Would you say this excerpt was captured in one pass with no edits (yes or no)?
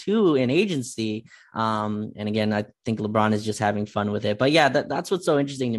yes